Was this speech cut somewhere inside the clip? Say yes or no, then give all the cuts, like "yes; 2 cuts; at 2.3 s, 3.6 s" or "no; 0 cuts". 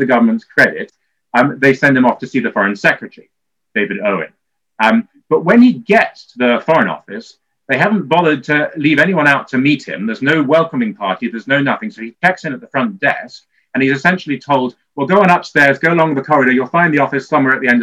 no; 0 cuts